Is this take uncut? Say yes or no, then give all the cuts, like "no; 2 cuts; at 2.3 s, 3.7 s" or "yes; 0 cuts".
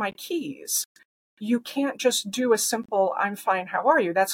yes; 0 cuts